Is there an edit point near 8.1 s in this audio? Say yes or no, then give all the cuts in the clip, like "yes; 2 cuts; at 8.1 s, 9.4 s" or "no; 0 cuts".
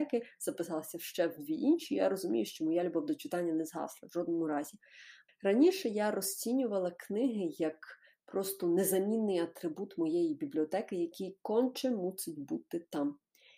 no; 1 cut; at 5.3 s